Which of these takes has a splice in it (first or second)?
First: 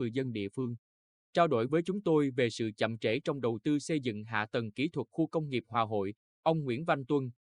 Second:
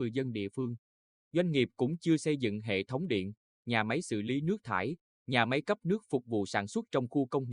second